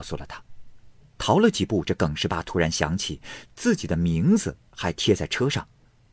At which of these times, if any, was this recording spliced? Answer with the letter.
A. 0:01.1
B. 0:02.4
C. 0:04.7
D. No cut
A